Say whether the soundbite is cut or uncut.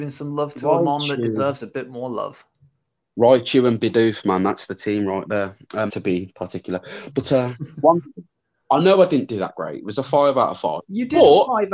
cut